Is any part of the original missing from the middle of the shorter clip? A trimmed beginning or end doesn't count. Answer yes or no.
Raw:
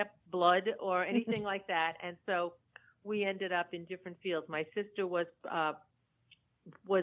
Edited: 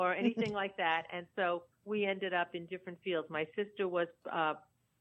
yes